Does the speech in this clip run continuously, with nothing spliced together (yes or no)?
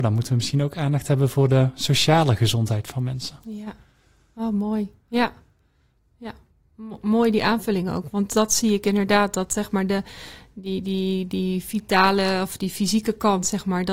yes